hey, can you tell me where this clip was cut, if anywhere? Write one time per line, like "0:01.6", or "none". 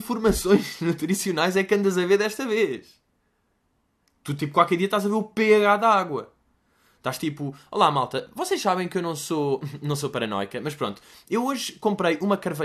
none